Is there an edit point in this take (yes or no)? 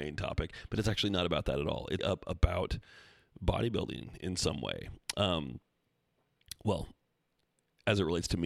yes